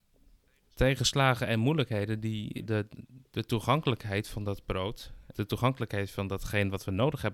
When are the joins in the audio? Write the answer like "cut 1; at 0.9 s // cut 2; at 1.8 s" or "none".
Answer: cut 1; at 2.6 s // cut 2; at 5.3 s